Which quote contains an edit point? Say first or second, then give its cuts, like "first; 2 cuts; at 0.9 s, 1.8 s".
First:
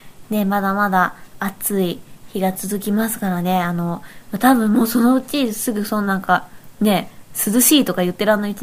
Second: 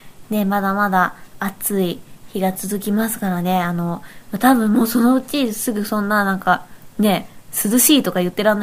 first; 1 cut; at 6.1 s